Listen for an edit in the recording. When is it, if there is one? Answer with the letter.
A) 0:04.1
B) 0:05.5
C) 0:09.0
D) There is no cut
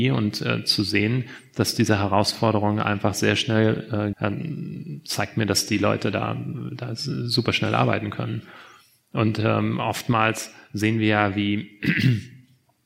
A